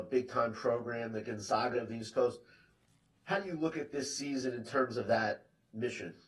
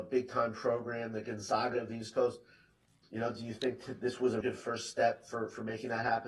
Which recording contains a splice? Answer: second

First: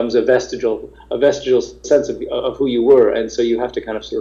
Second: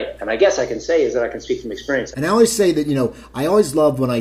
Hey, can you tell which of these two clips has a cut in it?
second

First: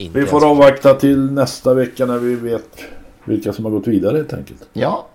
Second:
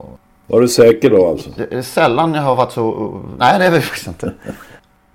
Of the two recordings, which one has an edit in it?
second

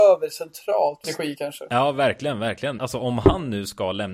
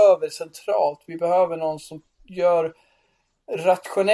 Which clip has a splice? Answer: first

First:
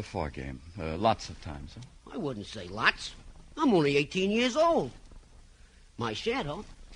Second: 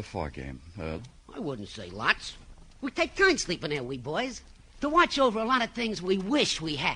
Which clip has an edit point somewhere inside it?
second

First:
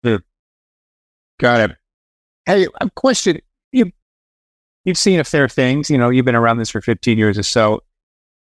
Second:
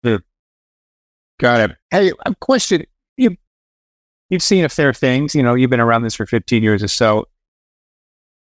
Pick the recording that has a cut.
second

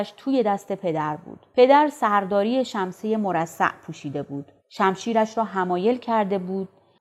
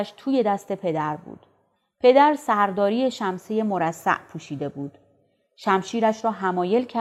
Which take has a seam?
first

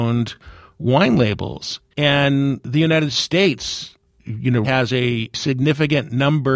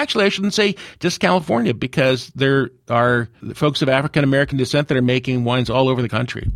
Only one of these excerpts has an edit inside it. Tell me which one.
first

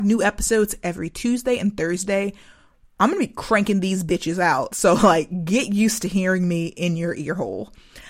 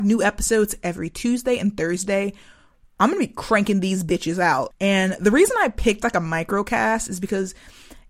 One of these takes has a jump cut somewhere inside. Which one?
second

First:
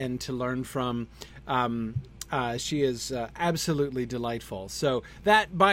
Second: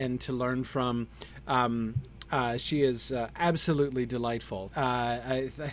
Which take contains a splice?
second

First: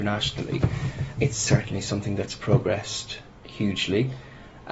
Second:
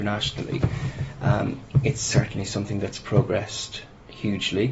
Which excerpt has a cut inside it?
first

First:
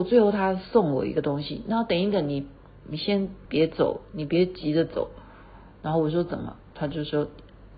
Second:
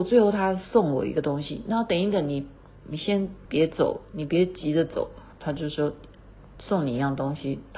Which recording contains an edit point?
second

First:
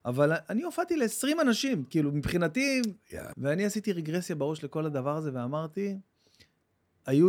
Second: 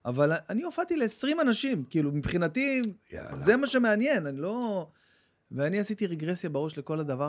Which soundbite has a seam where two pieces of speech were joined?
first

